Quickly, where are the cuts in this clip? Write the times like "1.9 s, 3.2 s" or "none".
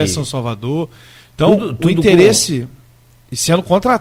none